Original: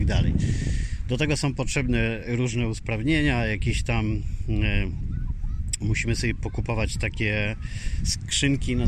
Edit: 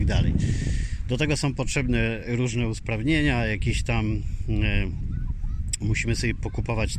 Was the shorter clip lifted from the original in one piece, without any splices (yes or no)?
yes